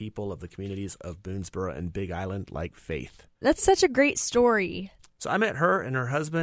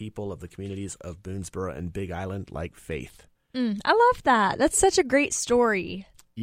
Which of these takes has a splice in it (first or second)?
first